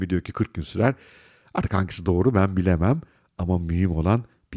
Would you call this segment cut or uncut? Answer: uncut